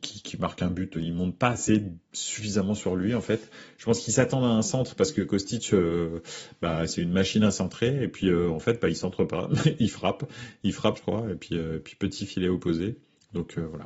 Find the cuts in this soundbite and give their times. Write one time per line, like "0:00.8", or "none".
0:00.9
0:11.0